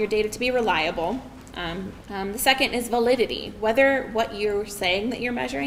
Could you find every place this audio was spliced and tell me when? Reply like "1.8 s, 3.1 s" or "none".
2.0 s

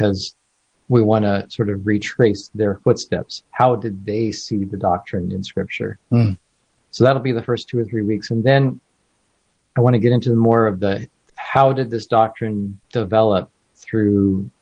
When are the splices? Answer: none

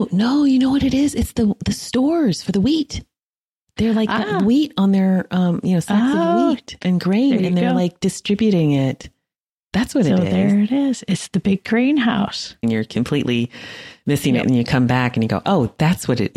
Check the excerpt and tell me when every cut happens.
12.6 s

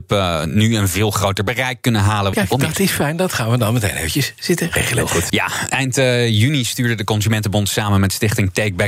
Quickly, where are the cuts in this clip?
2.3 s, 5.3 s

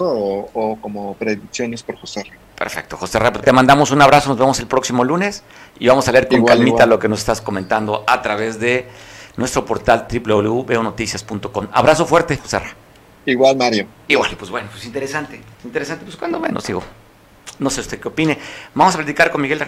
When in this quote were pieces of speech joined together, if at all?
12.4 s, 15.5 s

